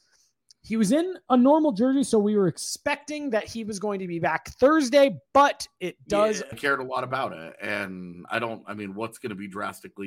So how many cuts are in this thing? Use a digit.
1